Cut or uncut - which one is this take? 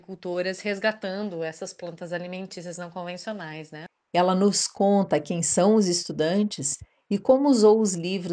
uncut